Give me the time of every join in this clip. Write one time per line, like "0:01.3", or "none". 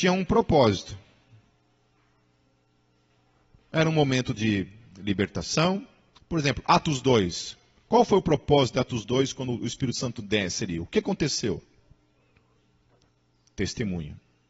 none

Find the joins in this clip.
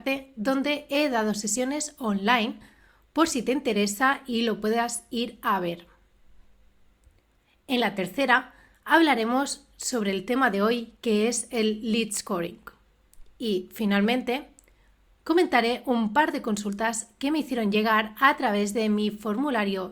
none

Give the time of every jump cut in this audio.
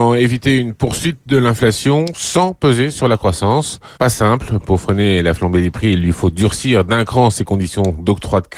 0:03.9

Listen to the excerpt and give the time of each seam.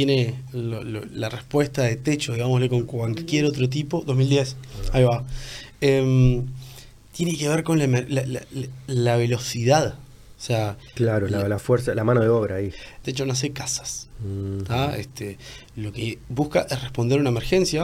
0:10.4
0:13.0

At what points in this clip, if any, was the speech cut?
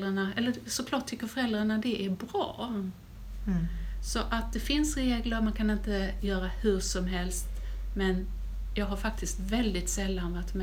none

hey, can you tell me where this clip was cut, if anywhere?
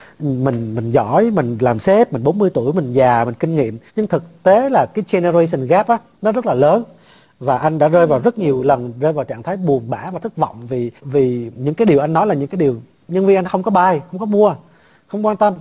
0:03.9
0:11.0
0:13.4

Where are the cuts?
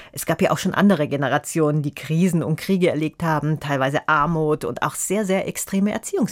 none

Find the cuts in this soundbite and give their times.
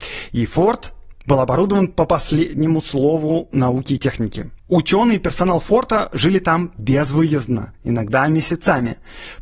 none

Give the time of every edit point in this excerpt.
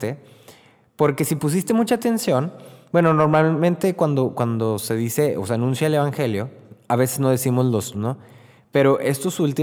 0:07.9

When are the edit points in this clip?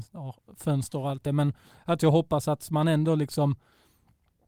none

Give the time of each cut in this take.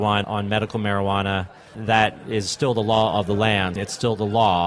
0:03.8

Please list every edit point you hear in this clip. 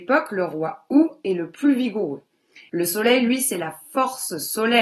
0:02.7

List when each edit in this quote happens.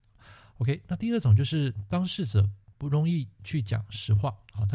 none

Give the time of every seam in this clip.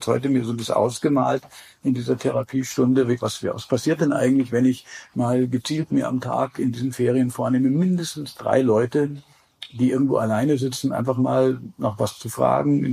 none

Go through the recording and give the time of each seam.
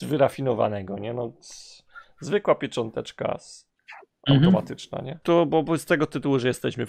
0:05.2

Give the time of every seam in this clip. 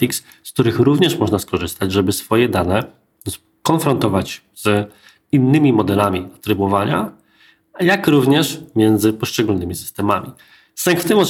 none

